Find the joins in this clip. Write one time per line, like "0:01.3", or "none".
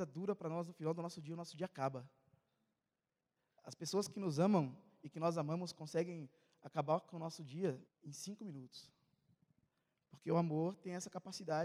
0:07.8